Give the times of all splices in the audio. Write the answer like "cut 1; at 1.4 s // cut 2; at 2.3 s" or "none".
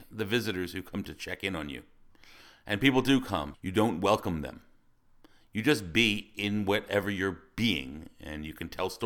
cut 1; at 3.5 s